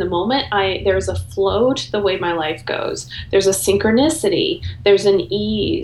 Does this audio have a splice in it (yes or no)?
no